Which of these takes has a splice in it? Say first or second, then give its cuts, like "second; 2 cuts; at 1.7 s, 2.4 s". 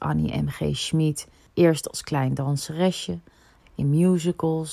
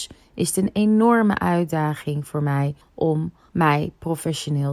first; 2 cuts; at 1.4 s, 3.6 s